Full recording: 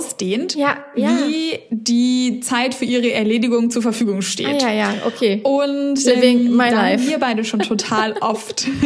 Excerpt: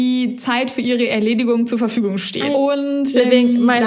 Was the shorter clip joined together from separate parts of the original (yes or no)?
yes